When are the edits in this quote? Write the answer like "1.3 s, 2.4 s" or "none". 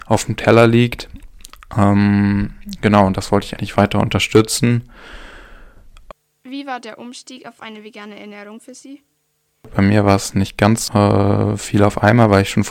3.6 s, 10.9 s